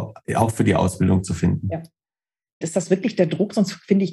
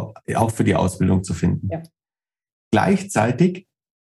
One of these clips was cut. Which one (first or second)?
first